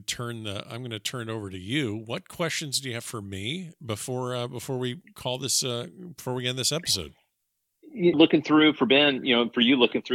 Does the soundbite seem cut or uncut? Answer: cut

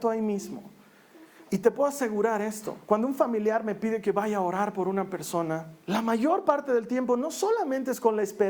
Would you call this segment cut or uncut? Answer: cut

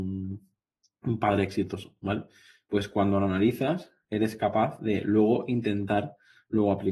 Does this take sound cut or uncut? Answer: uncut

